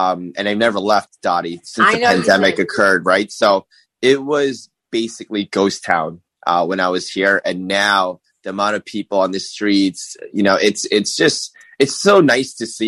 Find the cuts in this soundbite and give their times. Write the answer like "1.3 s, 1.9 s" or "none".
none